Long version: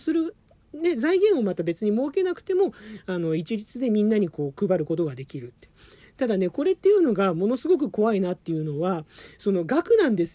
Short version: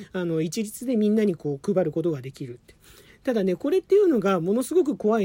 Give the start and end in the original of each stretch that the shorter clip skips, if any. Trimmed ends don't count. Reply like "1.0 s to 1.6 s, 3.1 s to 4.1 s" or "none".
none